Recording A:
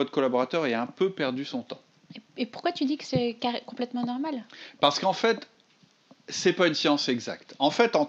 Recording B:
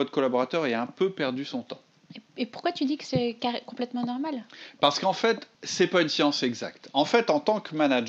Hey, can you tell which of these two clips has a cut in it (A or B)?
B